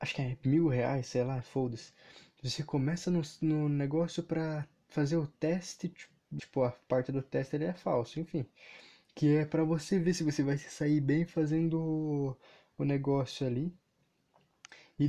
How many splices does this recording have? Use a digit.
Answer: 1